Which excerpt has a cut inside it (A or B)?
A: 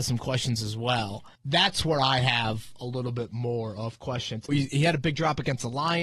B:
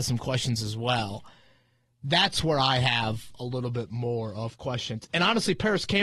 A